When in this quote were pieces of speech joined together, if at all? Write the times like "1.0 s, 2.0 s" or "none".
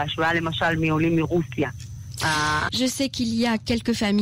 2.7 s